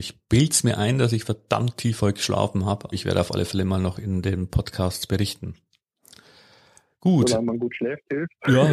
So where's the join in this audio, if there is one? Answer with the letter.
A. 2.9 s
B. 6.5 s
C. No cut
A